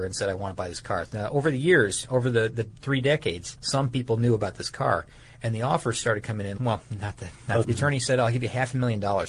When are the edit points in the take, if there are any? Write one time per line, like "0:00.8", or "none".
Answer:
0:03.6
0:06.6
0:07.6